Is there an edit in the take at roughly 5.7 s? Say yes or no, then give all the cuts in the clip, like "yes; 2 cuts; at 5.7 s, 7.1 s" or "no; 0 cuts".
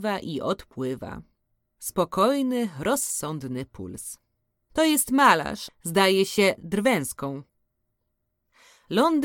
yes; 2 cuts; at 4.6 s, 5.7 s